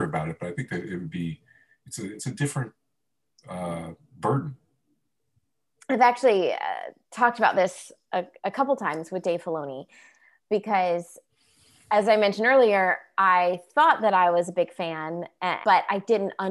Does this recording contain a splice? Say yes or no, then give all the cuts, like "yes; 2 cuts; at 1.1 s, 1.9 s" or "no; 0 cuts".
yes; 1 cut; at 15.6 s